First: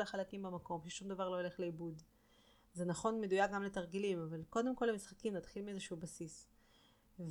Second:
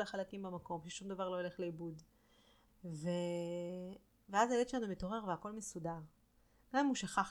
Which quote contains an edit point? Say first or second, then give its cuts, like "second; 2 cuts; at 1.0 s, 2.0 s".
second; 1 cut; at 2.7 s